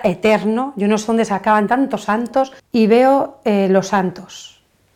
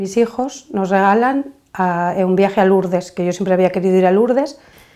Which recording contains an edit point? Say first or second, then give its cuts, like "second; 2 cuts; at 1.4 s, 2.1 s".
first; 1 cut; at 2.6 s